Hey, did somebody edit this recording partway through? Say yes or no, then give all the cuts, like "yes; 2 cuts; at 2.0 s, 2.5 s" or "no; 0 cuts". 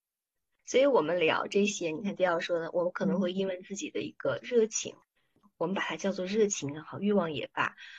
no; 0 cuts